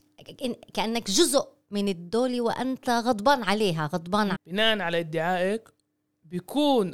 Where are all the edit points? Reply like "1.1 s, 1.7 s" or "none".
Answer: 4.3 s